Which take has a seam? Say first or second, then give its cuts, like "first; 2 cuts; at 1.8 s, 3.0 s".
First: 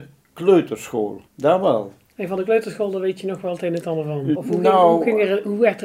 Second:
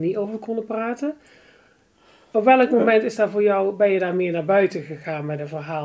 first; 2 cuts; at 1.3 s, 4.3 s